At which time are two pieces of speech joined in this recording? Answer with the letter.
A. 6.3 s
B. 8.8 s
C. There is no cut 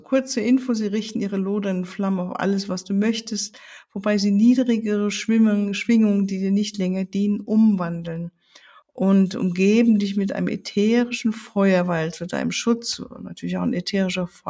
B